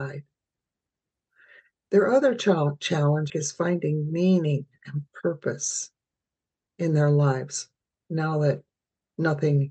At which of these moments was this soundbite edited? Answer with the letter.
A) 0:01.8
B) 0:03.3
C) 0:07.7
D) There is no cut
B